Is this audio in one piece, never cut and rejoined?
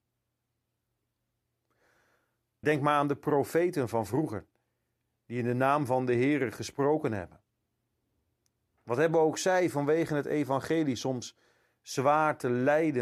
no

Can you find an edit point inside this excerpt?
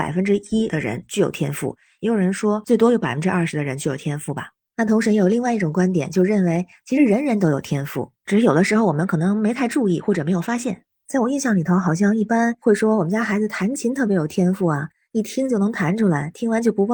no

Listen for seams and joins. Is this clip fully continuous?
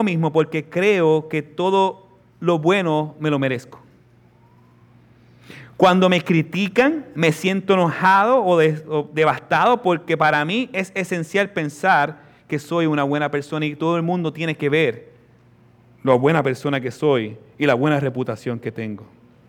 yes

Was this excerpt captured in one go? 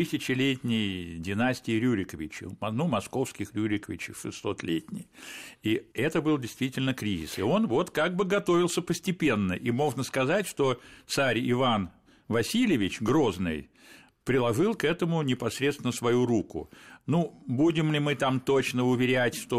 no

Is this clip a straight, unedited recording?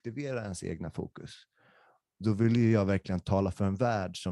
yes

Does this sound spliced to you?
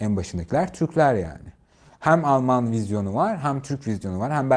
no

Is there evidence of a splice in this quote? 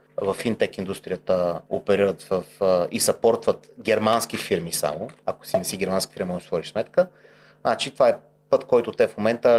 no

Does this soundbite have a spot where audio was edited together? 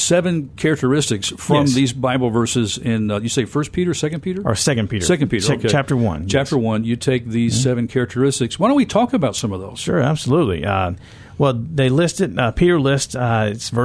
no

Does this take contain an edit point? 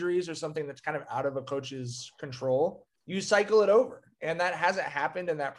yes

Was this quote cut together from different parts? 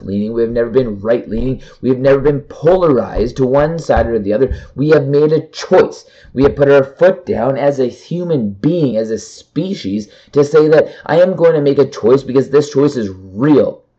no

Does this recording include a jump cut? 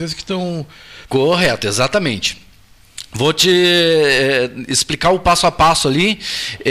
yes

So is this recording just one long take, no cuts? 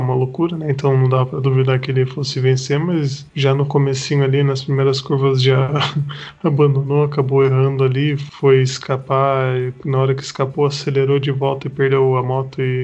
yes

